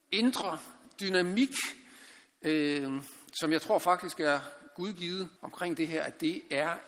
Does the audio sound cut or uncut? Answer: cut